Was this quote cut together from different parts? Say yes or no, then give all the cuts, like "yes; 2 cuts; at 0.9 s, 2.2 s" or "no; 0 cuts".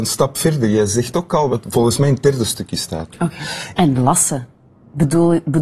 yes; 2 cuts; at 1.5 s, 3.8 s